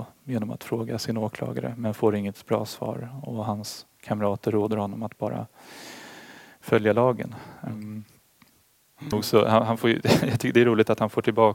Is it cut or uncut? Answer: cut